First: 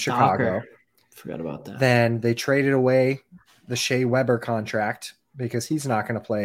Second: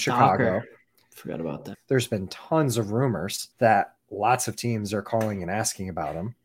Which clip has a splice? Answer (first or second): second